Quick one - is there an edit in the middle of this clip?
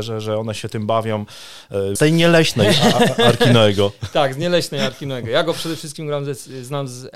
yes; 1 cut; at 2.0 s

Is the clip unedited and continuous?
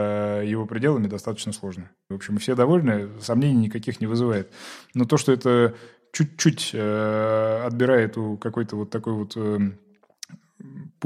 no; 1 cut; at 2.1 s

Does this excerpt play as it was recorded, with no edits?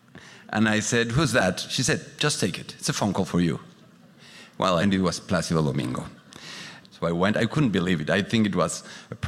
no; 2 cuts; at 4.8 s, 6.8 s

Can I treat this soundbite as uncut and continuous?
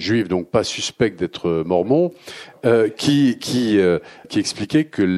no; 1 cut; at 4.2 s

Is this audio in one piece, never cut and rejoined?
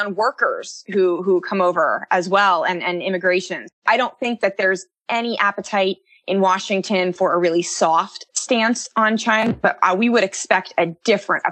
yes; 0 cuts

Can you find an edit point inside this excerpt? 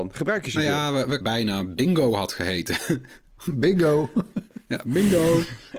yes; 1 cut; at 1.2 s

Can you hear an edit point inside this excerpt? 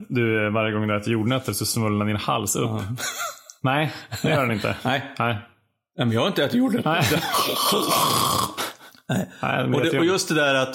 no; 0 cuts

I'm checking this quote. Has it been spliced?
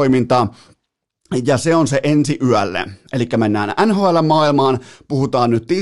no; 0 cuts

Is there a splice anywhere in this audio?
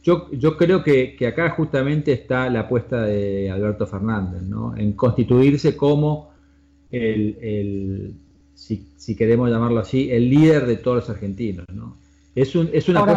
no; 0 cuts

